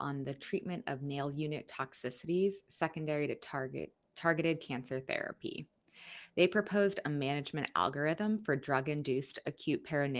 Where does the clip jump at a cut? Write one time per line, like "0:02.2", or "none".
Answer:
none